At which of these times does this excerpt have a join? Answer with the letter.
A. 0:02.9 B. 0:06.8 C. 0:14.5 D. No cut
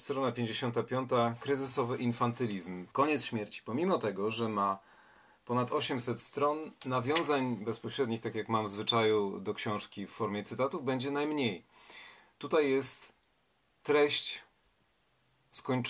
A